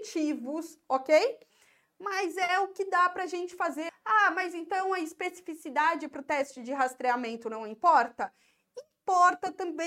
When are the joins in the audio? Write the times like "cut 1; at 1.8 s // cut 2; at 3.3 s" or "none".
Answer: cut 1; at 1.5 s // cut 2; at 3.9 s